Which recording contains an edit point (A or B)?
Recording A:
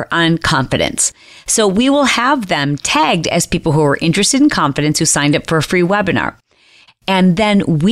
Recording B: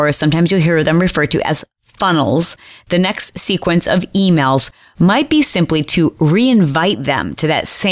A